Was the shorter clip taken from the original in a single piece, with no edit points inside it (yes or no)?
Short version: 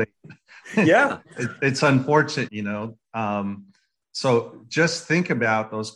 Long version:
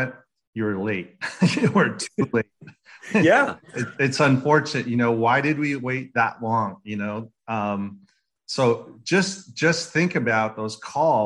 no